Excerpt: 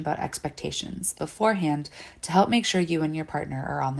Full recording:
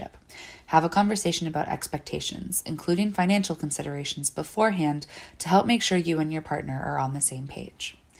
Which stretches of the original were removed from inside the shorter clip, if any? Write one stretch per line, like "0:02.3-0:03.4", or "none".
0:02.6-0:04.3

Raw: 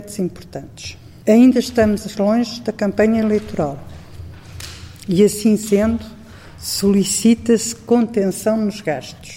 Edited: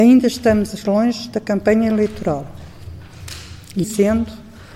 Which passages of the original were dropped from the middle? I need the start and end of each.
0:05.2-0:05.6

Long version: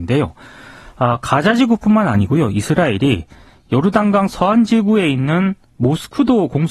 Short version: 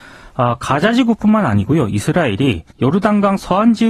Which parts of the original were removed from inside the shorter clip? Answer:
0:03.3-0:03.6

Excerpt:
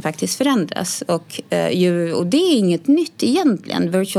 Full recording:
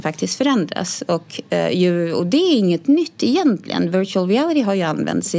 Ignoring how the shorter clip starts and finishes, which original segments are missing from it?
none

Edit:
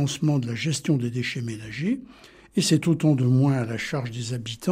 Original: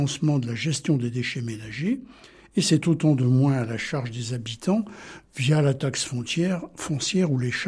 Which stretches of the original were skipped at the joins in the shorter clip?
none

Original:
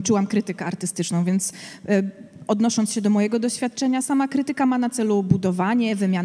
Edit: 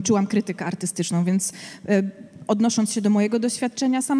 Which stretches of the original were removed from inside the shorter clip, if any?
none

